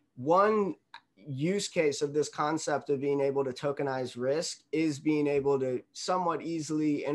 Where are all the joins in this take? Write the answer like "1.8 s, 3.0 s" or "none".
5.9 s